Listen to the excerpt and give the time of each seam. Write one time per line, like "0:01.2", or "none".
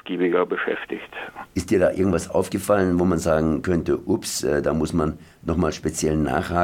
0:01.5